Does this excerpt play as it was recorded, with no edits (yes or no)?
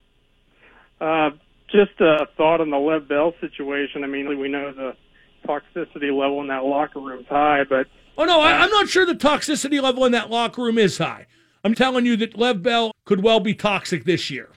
no